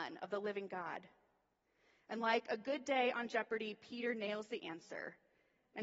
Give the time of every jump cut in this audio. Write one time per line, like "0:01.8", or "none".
none

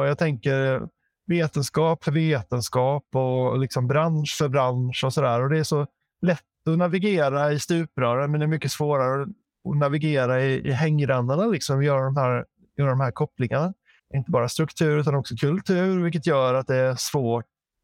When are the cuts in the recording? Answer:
0:14.0

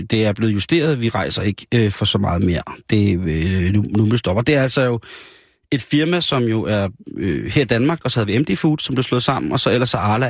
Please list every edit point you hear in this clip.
0:08.0

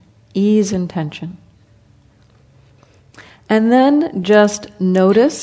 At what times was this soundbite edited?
none

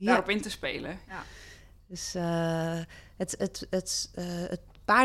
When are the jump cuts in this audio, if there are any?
0:01.1

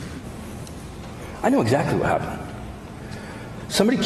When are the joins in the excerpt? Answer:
none

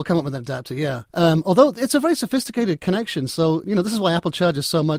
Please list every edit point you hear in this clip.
0:01.1
0:03.6

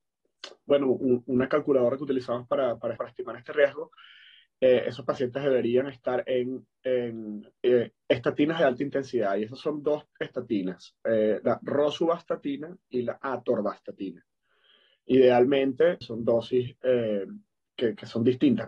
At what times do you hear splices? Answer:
0:03.0
0:16.0

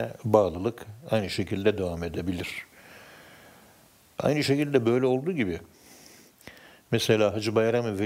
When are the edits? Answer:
none

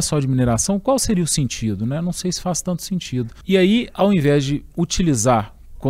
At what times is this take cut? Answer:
0:03.4

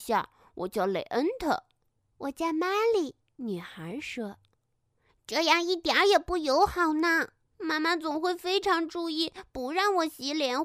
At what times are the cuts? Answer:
0:05.1
0:07.5

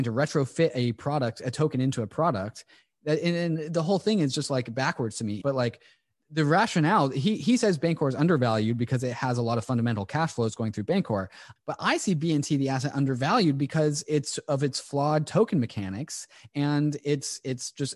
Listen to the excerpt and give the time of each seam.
0:05.4
0:11.6

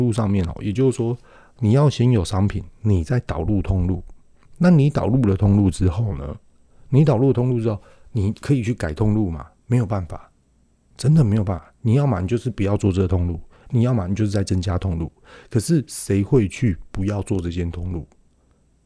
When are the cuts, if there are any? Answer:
none

